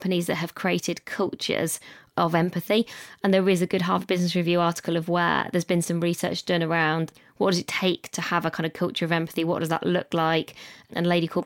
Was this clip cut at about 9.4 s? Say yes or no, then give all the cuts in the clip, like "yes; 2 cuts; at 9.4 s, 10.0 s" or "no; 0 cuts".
no; 0 cuts